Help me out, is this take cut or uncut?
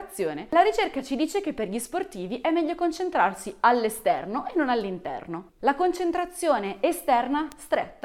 cut